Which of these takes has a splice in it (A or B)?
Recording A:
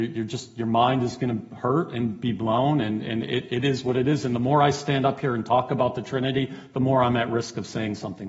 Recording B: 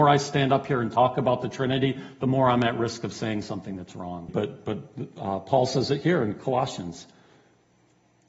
B